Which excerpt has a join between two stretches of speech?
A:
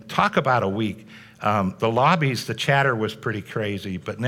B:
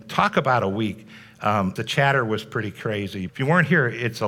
B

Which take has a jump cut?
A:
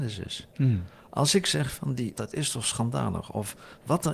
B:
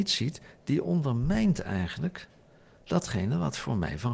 A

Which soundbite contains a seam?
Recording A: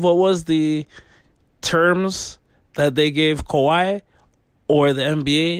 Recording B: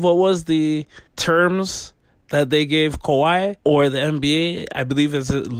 B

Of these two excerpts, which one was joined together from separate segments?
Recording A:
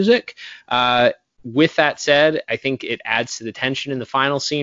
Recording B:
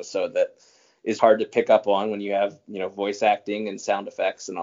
B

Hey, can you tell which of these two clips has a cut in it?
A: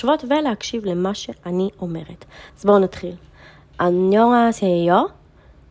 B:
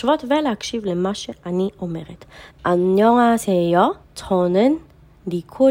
B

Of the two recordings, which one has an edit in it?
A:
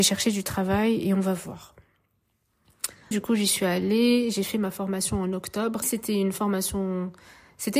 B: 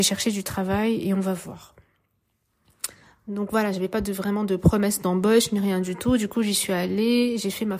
A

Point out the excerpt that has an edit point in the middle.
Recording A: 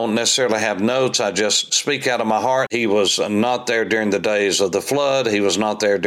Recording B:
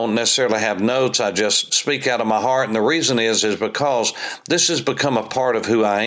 A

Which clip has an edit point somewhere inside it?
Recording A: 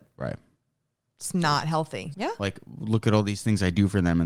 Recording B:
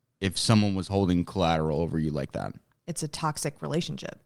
A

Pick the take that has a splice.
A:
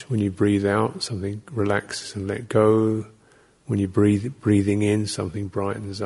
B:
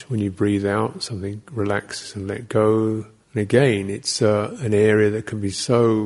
B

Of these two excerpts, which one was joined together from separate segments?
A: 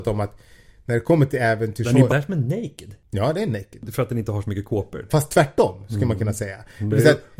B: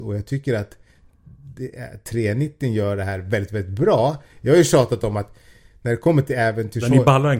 A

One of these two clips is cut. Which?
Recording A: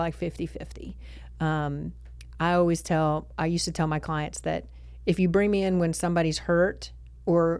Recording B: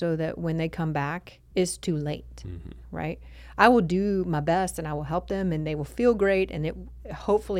B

